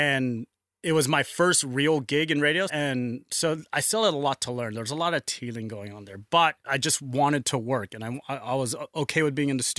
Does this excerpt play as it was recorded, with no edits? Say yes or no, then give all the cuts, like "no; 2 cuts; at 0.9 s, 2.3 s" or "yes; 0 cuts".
no; 2 cuts; at 2.7 s, 6.6 s